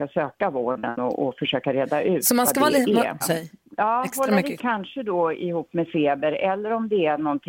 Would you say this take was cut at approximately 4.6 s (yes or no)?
yes